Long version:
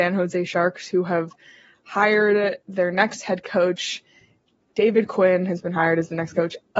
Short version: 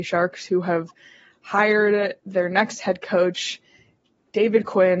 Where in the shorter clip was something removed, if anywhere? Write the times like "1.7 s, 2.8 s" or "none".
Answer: none